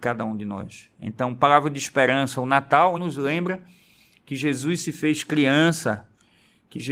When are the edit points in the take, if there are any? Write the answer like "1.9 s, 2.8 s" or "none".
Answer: 3.0 s